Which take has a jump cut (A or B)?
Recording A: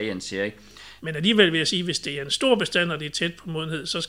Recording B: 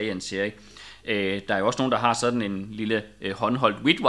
A